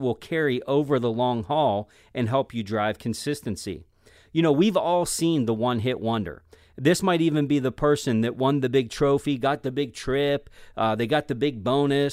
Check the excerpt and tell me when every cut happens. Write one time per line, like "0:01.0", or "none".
none